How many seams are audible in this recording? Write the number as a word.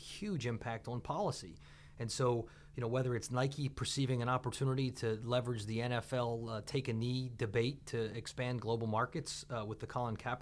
zero